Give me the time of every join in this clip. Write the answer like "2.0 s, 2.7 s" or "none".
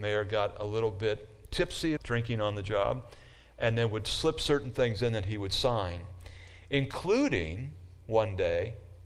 2.0 s

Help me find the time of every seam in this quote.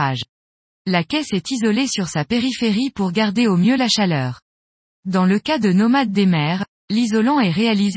none

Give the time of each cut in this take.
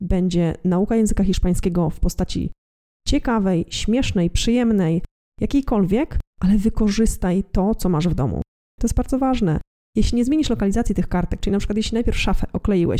8.8 s

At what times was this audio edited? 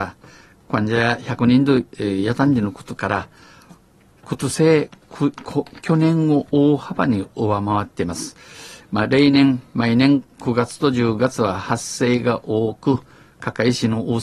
8.8 s

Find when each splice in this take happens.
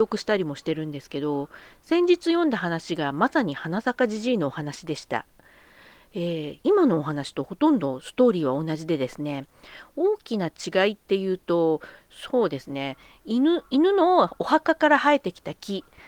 none

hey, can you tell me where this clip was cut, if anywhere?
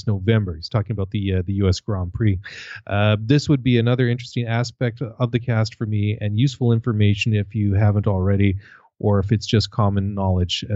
none

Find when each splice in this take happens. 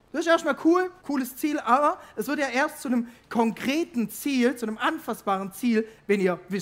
1.0 s

